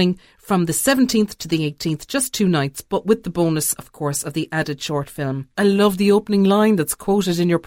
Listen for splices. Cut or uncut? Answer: cut